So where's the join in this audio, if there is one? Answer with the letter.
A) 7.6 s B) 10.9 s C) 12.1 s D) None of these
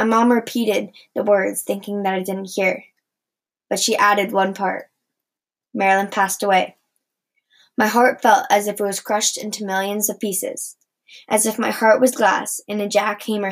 D